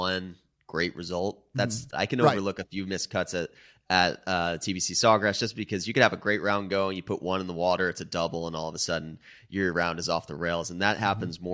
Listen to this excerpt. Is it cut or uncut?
cut